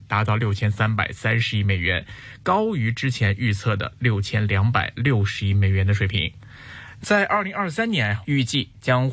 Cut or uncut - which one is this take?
cut